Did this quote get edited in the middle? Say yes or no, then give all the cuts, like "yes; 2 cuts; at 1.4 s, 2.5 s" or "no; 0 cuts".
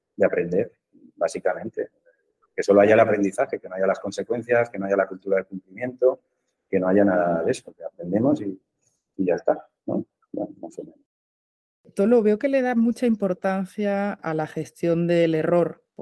yes; 2 cuts; at 10.2 s, 14.2 s